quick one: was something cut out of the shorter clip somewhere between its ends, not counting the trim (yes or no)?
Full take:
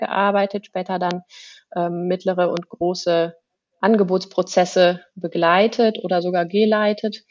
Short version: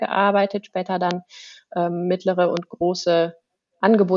no